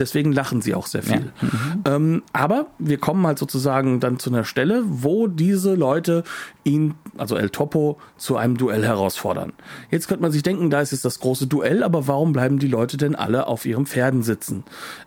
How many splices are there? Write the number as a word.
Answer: zero